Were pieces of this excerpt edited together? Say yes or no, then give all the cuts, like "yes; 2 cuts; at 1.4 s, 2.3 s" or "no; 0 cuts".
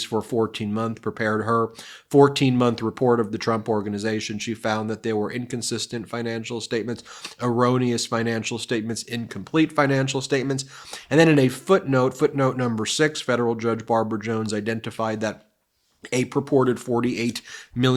no; 0 cuts